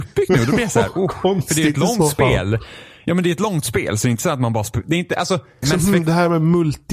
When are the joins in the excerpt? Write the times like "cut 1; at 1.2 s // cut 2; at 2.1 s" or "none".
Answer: cut 1; at 5.6 s